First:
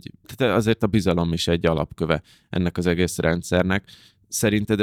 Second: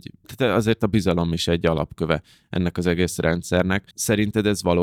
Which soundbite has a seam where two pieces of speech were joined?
second; 1 cut; at 3.9 s

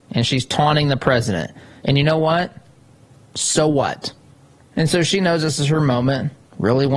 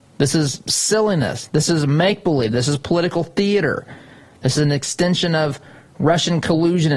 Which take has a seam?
first; 2 cuts; at 1.8 s, 4.6 s

